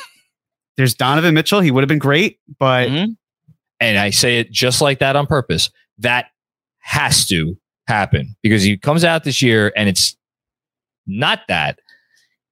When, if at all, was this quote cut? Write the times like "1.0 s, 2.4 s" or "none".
3.6 s